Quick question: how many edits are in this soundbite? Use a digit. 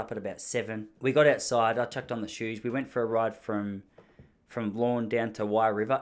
1